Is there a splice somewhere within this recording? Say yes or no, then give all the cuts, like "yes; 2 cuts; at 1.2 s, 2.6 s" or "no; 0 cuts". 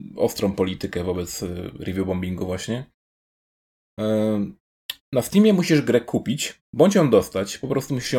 no; 0 cuts